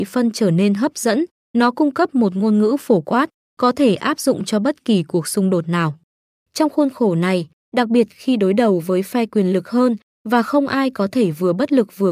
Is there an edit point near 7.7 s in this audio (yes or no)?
yes